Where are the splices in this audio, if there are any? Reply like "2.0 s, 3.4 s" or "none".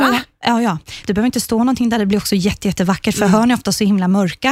1.0 s